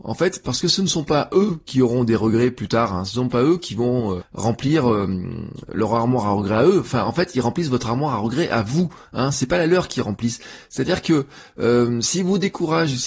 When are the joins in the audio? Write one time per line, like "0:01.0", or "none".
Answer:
0:04.2